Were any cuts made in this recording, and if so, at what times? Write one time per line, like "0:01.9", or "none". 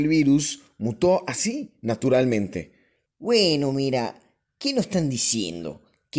none